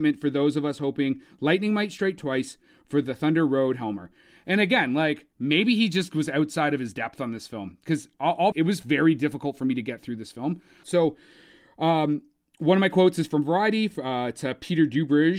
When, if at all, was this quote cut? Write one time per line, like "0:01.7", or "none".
0:08.5
0:10.8